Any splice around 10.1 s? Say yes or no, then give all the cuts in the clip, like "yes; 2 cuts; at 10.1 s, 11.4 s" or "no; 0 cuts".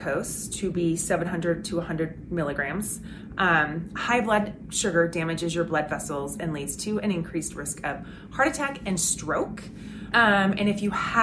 yes; 1 cut; at 10.1 s